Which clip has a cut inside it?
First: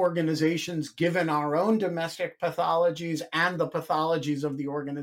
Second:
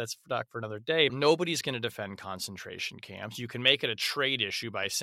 second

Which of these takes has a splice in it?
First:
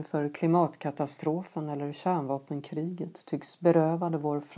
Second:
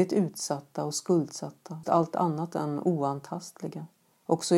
second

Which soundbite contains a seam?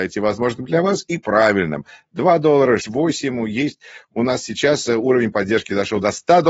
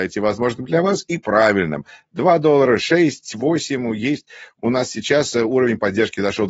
first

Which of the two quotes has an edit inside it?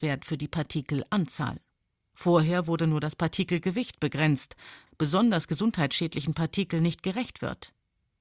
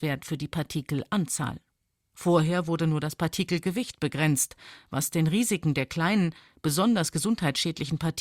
first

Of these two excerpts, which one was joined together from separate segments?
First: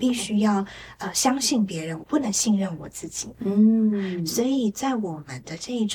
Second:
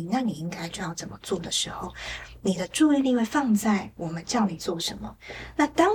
first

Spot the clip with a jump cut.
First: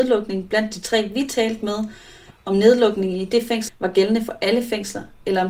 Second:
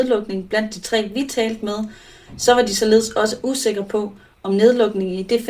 first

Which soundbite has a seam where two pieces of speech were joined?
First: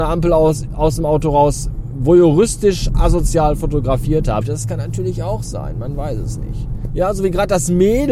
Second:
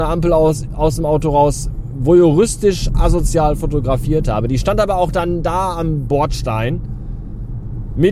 first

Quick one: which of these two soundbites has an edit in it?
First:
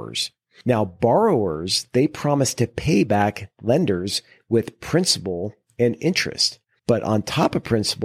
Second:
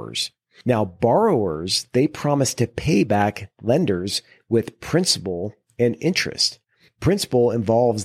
first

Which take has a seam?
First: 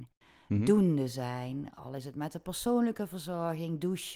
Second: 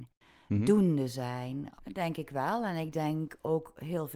second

